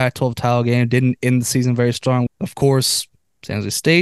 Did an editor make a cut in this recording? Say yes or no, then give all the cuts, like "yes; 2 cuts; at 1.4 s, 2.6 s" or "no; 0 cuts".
yes; 1 cut; at 2.3 s